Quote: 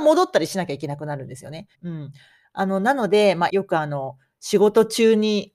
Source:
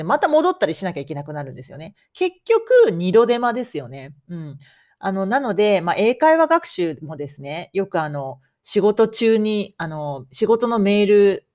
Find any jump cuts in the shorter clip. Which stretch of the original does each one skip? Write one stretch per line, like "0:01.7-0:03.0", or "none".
0:02.0-0:04.2
0:05.9-0:07.7